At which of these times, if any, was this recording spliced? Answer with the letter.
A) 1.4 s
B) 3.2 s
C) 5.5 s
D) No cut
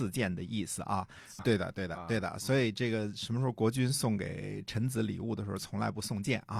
A